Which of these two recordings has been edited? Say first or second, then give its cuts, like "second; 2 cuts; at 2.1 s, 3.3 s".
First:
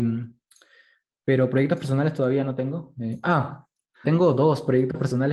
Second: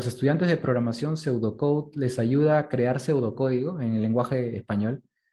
first; 1 cut; at 4.0 s